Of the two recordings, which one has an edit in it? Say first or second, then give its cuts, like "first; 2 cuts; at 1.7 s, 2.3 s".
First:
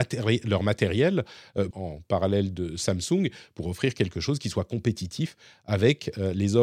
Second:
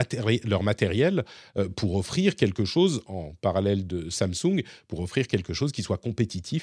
first; 1 cut; at 1.7 s